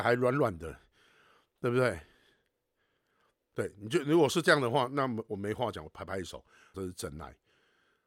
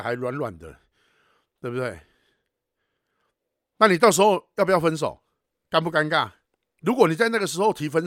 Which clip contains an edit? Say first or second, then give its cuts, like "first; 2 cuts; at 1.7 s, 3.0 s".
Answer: first; 2 cuts; at 3.4 s, 6.7 s